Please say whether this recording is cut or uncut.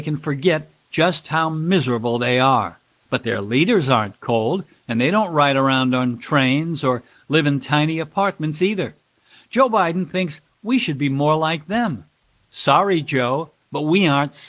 uncut